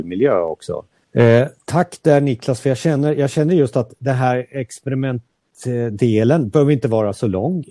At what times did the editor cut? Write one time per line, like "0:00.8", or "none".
0:01.0